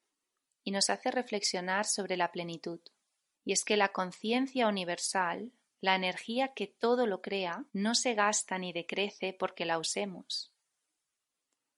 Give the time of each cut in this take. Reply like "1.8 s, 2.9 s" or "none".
3.3 s, 5.7 s, 7.7 s